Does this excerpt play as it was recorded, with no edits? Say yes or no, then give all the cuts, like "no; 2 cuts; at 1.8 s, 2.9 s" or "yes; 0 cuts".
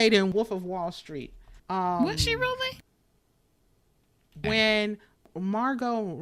no; 2 cuts; at 1.6 s, 4.4 s